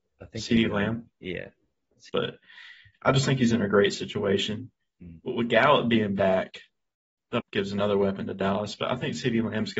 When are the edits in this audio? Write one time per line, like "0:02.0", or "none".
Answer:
0:02.1
0:04.8
0:07.4